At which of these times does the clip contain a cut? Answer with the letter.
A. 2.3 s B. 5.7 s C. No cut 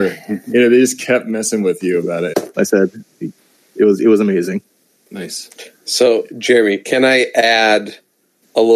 A